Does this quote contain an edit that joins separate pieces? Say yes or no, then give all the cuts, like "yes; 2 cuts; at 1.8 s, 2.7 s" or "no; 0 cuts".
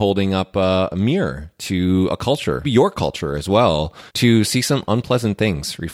yes; 2 cuts; at 2.6 s, 4.1 s